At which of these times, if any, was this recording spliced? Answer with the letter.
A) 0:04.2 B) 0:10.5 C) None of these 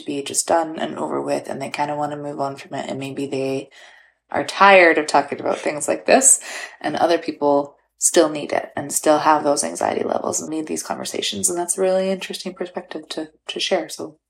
B